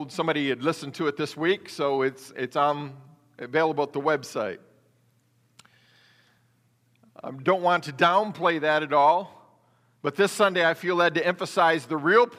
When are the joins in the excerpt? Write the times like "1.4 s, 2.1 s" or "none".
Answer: none